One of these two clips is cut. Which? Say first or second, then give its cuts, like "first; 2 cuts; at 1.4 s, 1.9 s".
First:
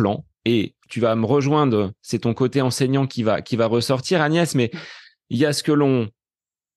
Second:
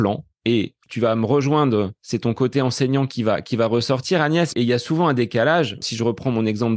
second; 1 cut; at 4.5 s